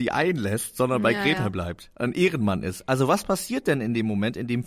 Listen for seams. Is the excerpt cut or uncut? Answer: uncut